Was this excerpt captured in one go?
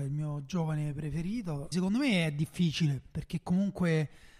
no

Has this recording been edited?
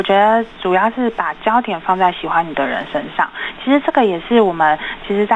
no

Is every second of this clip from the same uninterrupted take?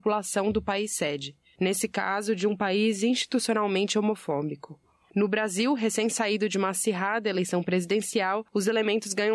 yes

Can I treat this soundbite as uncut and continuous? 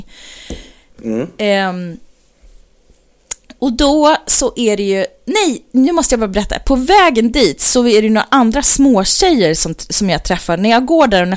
yes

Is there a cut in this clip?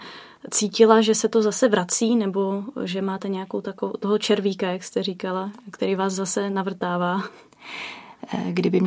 no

